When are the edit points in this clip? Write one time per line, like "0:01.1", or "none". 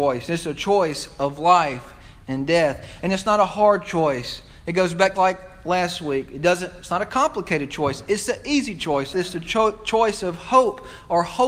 0:05.1
0:09.1